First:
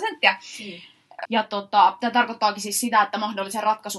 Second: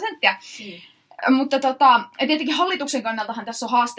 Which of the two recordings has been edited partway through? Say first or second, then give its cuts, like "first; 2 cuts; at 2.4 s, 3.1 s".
first; 1 cut; at 1.2 s